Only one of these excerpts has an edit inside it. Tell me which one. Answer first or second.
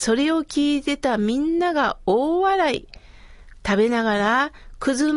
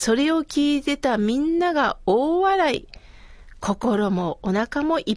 first